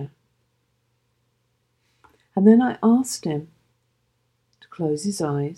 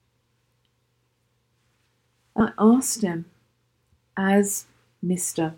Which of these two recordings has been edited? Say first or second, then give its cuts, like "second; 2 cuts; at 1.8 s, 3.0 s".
second; 1 cut; at 2.4 s